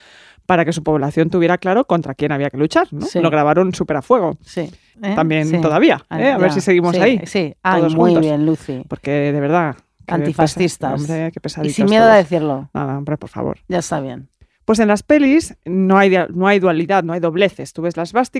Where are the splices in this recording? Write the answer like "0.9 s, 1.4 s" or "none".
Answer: 4.9 s